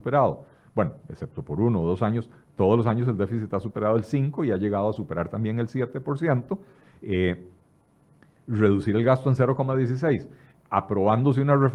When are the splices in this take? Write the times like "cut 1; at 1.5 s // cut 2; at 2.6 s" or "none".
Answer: none